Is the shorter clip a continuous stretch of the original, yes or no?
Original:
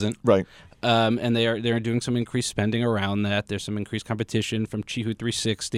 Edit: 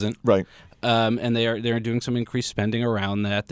yes